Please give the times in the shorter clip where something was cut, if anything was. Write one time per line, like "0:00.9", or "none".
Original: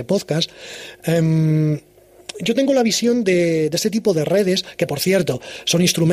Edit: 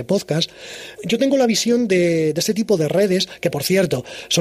0:01.0